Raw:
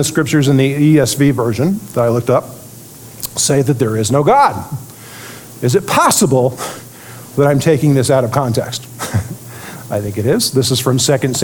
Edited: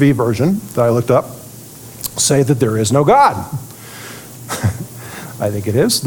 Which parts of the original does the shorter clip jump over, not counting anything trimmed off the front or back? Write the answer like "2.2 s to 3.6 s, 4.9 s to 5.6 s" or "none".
5.5 s to 8.8 s